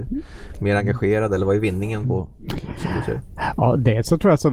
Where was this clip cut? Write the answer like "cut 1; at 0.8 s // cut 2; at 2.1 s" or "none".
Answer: none